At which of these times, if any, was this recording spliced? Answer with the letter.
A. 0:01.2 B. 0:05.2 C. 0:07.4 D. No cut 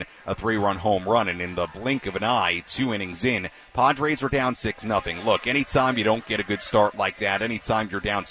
D